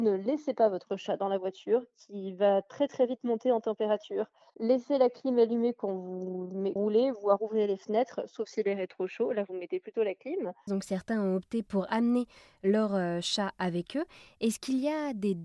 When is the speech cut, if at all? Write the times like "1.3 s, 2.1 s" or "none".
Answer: 6.8 s, 10.7 s